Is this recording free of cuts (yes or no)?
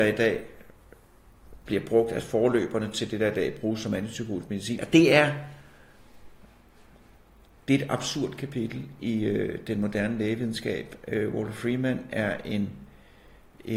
no